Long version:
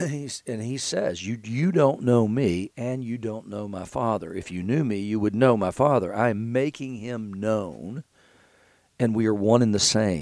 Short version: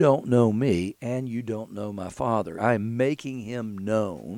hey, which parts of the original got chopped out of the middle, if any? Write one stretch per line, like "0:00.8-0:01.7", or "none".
0:04.3-0:06.1